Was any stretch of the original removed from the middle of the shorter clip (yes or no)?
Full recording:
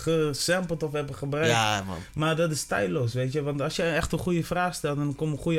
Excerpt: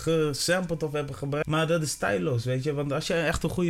yes